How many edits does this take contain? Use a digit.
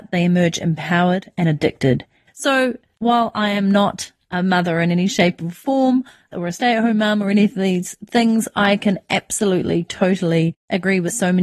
1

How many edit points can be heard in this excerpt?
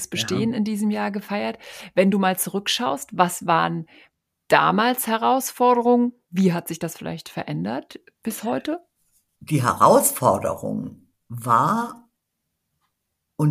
0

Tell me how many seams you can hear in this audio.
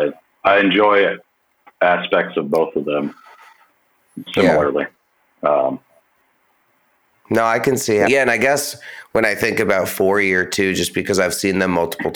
2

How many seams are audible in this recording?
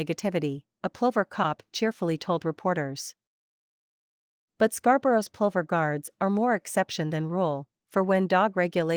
0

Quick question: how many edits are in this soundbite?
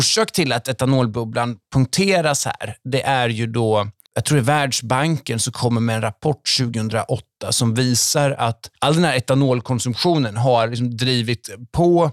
2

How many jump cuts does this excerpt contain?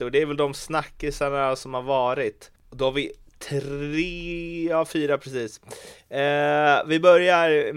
0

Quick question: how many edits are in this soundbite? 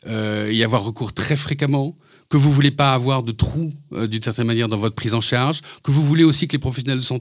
0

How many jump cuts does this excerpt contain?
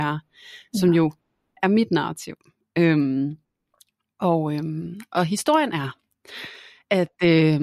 0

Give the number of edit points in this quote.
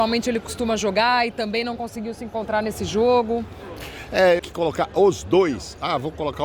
1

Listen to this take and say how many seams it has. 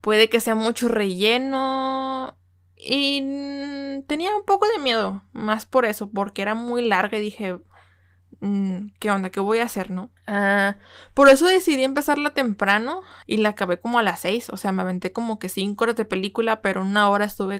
1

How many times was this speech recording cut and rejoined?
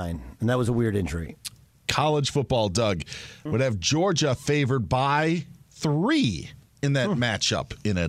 2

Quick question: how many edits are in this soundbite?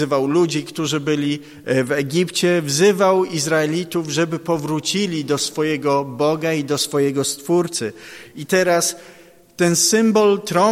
0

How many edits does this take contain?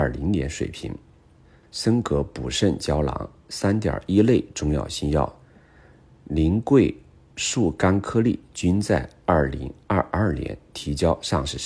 1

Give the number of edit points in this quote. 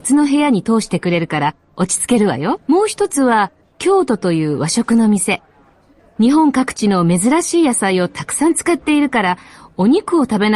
2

